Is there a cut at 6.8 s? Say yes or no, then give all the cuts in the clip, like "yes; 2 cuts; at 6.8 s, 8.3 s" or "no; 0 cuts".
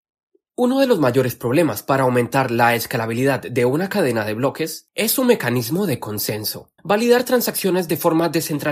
yes; 1 cut; at 6.8 s